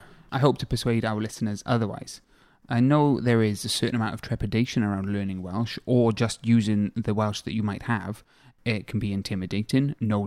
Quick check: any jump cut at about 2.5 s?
no; 0 cuts

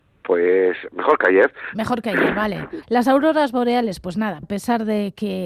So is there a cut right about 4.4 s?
yes; 2 cuts; at 2.8 s, 4.4 s

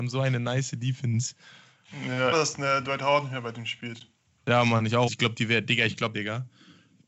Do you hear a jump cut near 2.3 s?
yes; 3 cuts; at 2.3 s, 5.1 s, 6.1 s

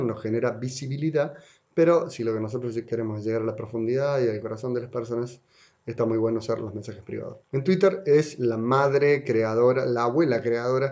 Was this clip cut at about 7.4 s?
yes; 1 cut; at 7.4 s

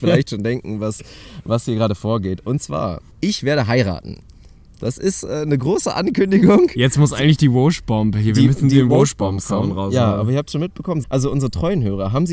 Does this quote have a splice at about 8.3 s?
no; 2 cuts; at 3.1 s, 11.0 s

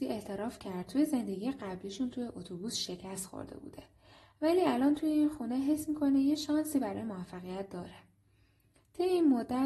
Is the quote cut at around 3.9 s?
no; 0 cuts

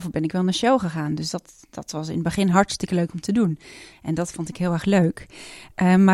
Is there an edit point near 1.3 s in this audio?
no; 1 cut; at 3.9 s

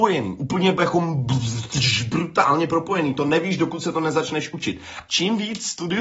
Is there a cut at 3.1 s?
no; 1 cut; at 5.1 s

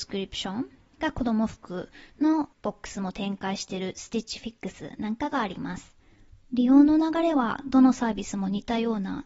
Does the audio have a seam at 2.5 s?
yes; 2 cuts; at 2.5 s, 6.4 s

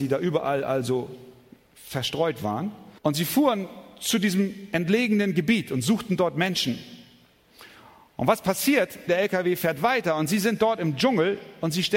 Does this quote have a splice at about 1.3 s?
no; 2 cuts; at 3.0 s, 9.1 s

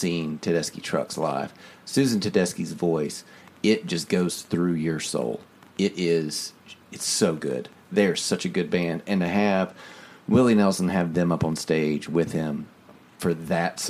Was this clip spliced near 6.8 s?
yes; 1 cut; at 6.8 s

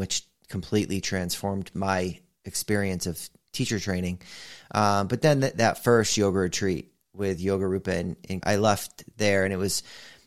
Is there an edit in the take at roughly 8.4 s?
yes; 1 cut; at 8.4 s

